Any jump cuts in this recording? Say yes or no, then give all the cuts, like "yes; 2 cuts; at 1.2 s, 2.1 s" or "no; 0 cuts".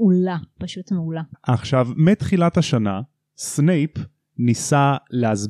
yes; 1 cut; at 1.3 s